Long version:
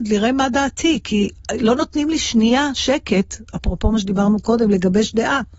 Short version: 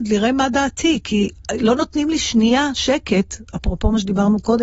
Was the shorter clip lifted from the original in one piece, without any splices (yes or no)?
yes